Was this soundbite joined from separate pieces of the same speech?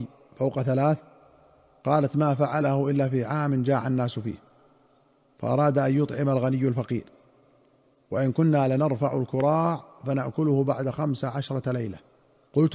no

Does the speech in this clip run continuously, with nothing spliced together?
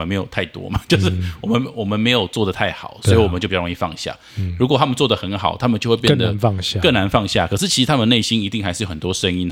yes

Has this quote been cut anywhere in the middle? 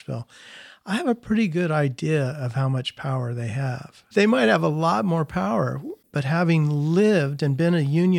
yes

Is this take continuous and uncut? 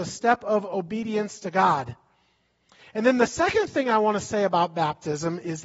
yes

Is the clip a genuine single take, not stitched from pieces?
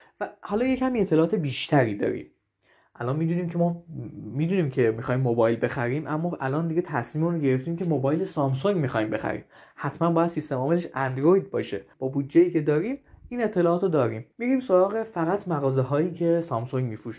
no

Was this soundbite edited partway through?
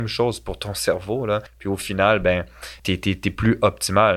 yes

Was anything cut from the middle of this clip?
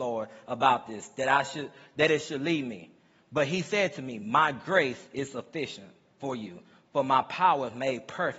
no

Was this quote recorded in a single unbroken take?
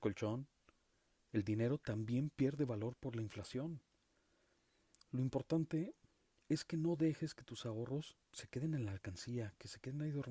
no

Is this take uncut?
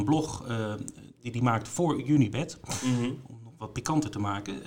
yes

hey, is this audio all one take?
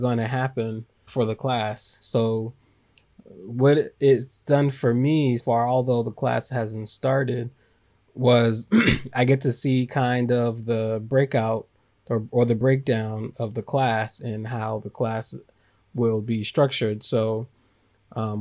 no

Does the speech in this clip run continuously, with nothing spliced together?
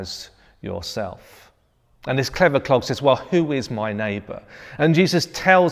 yes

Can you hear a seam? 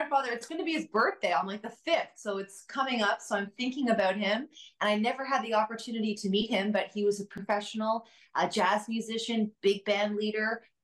no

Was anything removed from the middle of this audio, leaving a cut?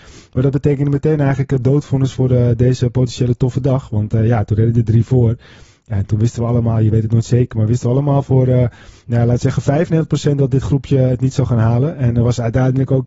no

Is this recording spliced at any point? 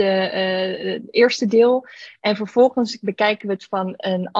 no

